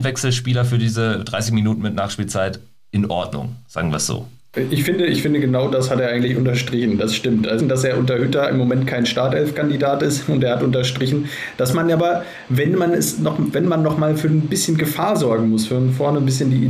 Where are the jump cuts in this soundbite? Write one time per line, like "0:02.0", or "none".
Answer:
0:07.6